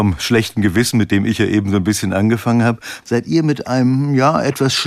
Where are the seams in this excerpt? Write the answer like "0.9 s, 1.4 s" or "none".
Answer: 3.0 s

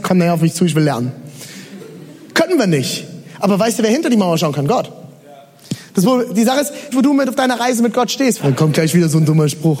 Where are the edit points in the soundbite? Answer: 6.9 s, 8.4 s

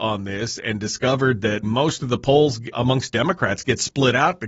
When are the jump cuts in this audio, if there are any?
1.6 s, 2.7 s

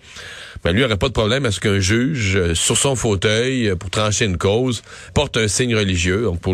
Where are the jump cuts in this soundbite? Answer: 5.1 s

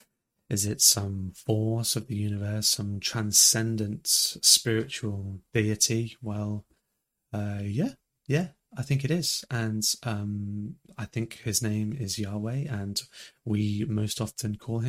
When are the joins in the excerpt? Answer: none

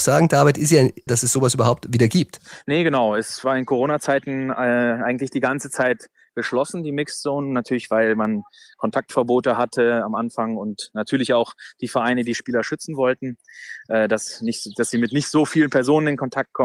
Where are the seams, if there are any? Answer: 1.1 s

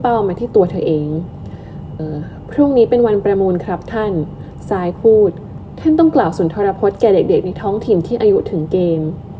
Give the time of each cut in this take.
2.0 s

